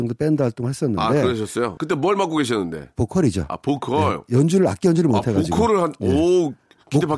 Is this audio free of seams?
yes; 0 cuts

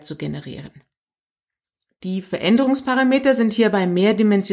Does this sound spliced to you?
no; 0 cuts

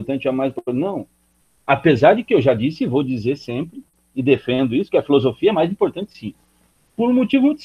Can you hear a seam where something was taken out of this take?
no; 0 cuts

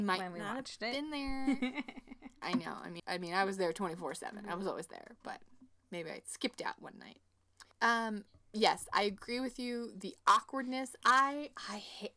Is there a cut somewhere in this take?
yes; 2 cuts; at 3.0 s, 7.7 s

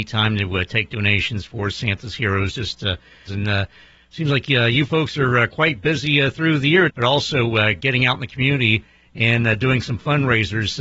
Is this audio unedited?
no; 2 cuts; at 3.3 s, 6.9 s

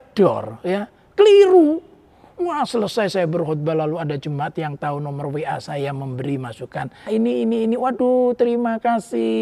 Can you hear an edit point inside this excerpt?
yes; 1 cut; at 7.1 s

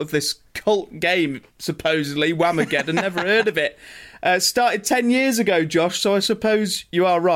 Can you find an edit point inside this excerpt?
no; 0 cuts

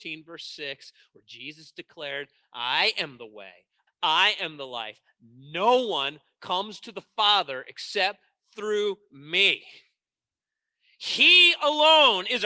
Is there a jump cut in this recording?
yes; 1 cut; at 3.9 s

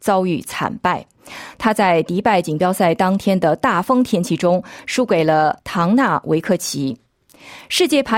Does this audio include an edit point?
no; 0 cuts

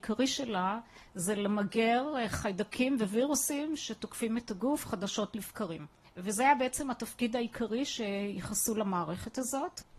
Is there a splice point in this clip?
no; 0 cuts

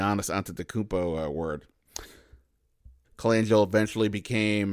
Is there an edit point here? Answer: yes; 1 cut; at 3.0 s

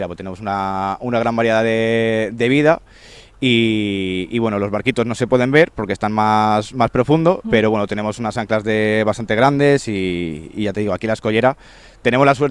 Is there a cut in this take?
yes; 1 cut; at 7.4 s

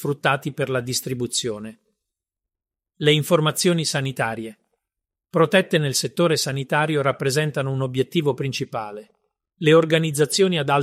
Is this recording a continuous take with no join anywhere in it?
yes; 0 cuts

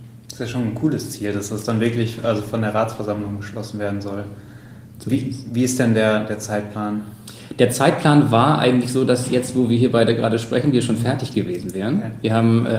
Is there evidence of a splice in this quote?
no; 0 cuts

